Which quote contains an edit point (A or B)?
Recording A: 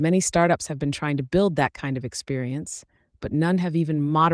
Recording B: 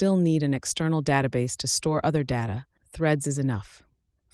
B